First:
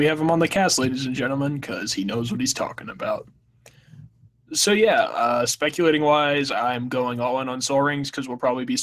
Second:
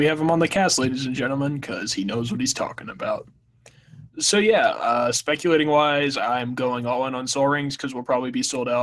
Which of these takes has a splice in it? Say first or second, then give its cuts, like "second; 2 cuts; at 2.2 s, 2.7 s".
second; 1 cut; at 4.1 s